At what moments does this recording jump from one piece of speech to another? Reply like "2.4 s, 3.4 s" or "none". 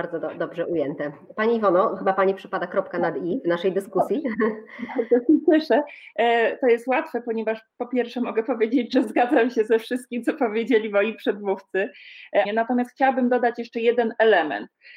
12.4 s